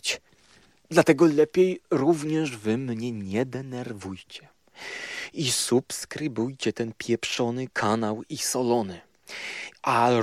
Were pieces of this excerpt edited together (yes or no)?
no